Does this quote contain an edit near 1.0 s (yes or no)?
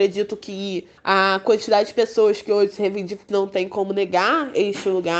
yes